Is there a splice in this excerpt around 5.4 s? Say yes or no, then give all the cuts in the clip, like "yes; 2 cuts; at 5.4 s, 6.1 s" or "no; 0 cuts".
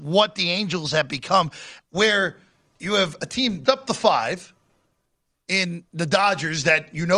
no; 2 cuts; at 1.8 s, 3.7 s